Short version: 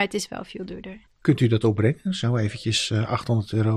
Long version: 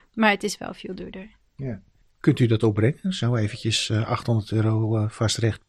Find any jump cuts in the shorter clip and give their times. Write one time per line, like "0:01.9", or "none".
0:01.1